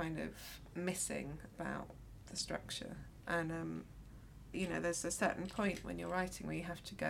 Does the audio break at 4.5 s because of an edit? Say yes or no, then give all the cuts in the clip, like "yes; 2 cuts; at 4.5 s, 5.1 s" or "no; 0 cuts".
yes; 1 cut; at 4.5 s